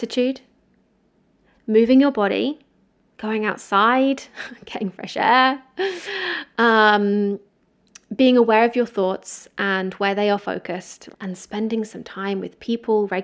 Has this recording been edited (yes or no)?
yes